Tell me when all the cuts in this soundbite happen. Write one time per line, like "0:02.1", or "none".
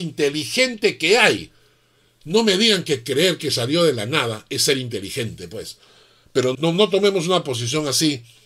0:06.5